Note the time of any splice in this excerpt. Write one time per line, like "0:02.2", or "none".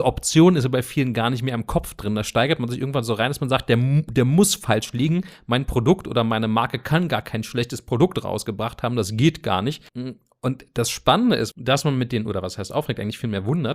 0:09.9
0:11.5